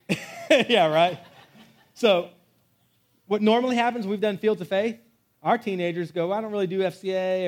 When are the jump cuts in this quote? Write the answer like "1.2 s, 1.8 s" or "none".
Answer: none